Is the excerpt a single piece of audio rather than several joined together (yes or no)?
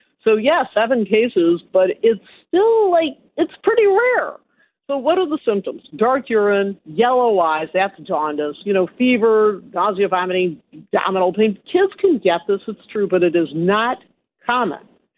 no